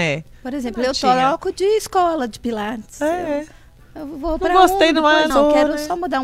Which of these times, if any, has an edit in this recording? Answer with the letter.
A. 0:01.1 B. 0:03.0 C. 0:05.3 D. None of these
C